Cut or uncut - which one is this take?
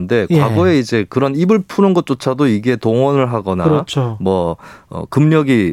uncut